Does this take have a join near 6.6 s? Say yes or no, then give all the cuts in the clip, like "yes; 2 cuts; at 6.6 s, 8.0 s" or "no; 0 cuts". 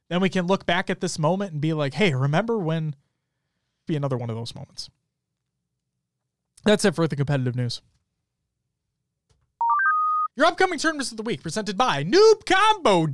no; 2 cuts; at 3.9 s, 10.3 s